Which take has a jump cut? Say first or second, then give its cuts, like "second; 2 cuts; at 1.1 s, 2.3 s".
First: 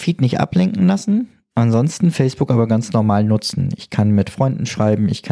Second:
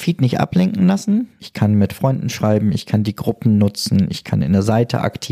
second; 1 cut; at 1.4 s